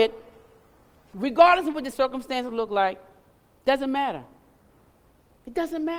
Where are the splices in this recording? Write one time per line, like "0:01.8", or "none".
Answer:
0:01.9